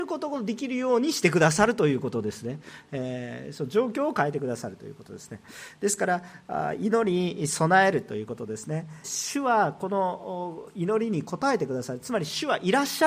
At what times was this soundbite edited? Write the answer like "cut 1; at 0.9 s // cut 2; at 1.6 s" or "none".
cut 1; at 9.0 s

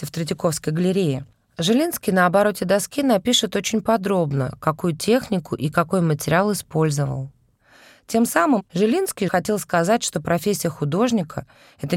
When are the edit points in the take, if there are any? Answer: none

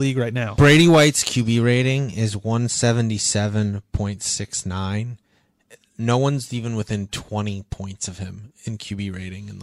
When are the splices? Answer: none

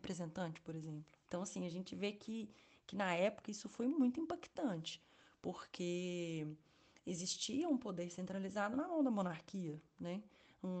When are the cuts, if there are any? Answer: cut 1; at 1.3 s

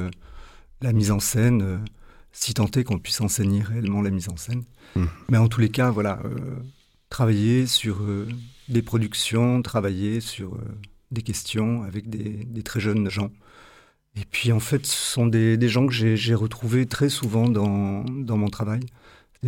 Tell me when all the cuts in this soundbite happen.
cut 1; at 13.1 s

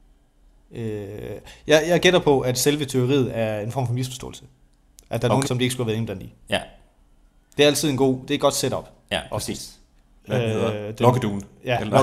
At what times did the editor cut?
cut 1; at 5.4 s // cut 2; at 10.2 s

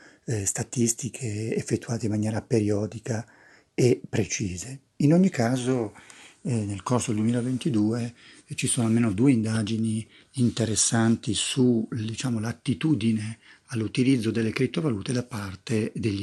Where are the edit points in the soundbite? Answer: none

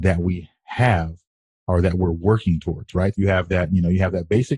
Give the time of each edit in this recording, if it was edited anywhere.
cut 1; at 3.1 s

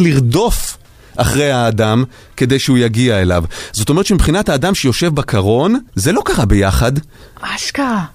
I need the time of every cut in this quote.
cut 1; at 5.9 s

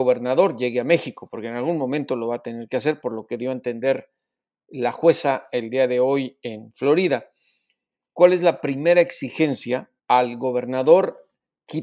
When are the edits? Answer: cut 1; at 8.2 s // cut 2; at 10.0 s

